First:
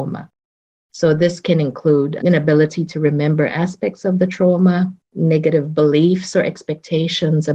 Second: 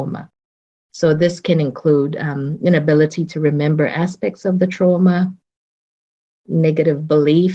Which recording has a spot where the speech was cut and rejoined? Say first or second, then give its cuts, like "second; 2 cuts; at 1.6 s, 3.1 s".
first; 2 cuts; at 2.2 s, 5.0 s